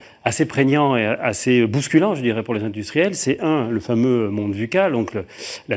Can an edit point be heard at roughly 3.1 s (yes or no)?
no